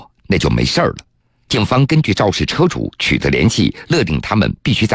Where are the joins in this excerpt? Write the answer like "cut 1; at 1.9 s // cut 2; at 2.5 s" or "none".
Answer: cut 1; at 1.5 s